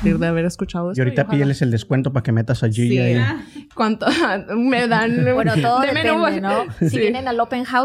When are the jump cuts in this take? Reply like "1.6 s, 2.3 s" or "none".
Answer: none